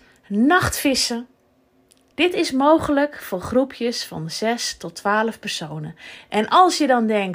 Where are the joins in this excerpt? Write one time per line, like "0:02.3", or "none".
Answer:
0:02.1

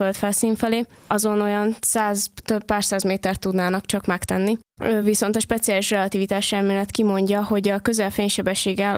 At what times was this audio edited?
none

